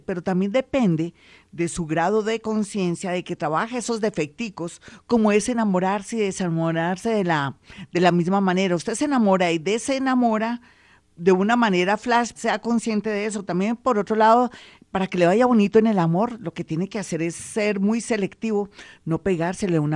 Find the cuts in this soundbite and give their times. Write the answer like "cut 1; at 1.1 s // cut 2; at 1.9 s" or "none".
cut 1; at 12.3 s